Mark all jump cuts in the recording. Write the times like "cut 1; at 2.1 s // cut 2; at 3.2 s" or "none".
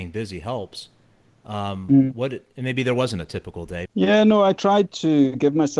cut 1; at 3.9 s